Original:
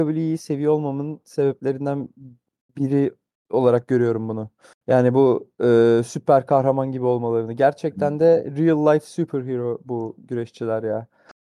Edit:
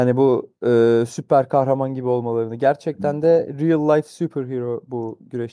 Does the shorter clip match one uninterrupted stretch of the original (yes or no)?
yes